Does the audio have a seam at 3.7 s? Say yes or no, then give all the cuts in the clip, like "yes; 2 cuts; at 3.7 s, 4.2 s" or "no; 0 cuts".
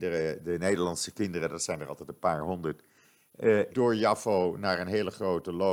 yes; 1 cut; at 3.7 s